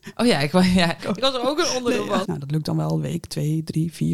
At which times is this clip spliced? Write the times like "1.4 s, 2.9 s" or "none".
1.0 s, 2.2 s